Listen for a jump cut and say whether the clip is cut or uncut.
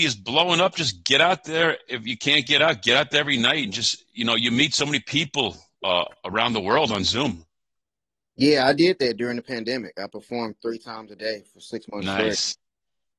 uncut